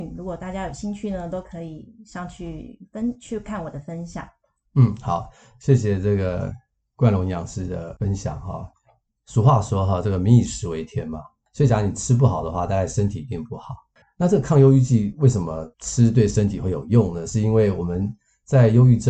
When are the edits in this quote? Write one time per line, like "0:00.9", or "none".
0:14.0
0:15.7